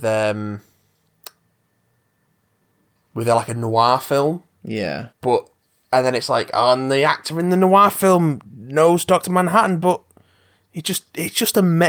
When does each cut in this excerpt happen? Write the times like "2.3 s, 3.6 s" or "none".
5.1 s